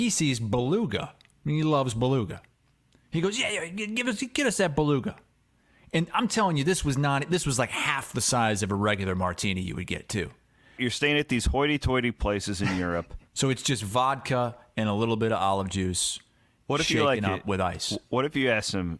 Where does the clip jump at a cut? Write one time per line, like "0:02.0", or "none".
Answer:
0:10.8
0:13.3